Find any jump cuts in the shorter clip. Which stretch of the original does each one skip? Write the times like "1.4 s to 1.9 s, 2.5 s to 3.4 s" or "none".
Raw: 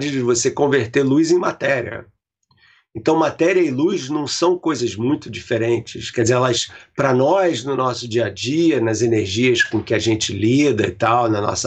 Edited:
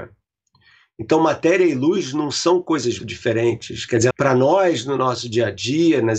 5.0 s to 5.2 s, 6.4 s to 6.9 s